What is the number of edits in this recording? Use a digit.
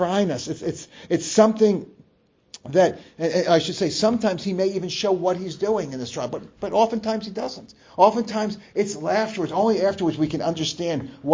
0